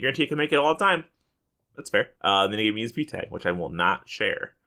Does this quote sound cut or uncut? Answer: cut